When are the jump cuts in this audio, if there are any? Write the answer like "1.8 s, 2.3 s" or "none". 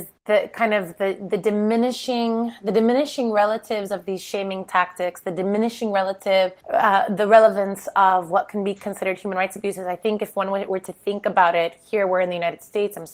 none